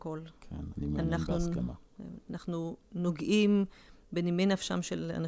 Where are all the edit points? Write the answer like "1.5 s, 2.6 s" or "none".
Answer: none